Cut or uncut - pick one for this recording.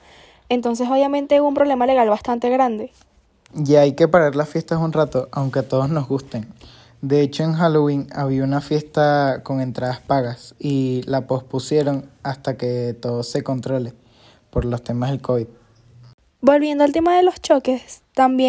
cut